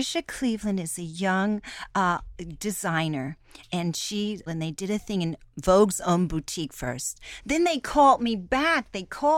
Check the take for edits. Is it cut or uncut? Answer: cut